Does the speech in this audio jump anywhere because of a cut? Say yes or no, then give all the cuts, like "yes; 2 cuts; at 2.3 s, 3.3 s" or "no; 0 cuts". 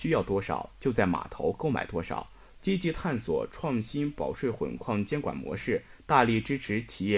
yes; 1 cut; at 2.6 s